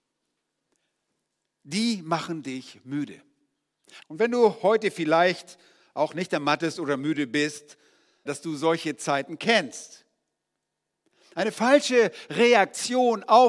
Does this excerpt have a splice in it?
yes; 2 cuts; at 4.0 s, 8.3 s

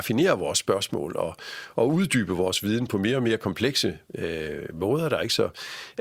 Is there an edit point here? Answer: no; 0 cuts

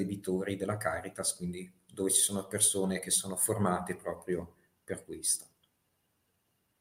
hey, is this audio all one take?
yes; 0 cuts

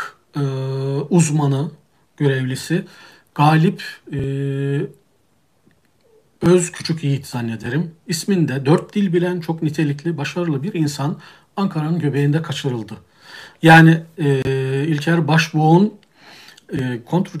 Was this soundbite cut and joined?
no; 0 cuts

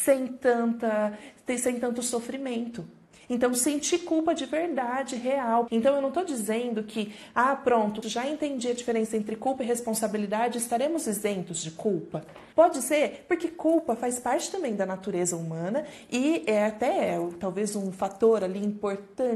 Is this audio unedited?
no; 3 cuts; at 5.7 s, 8.0 s, 12.5 s

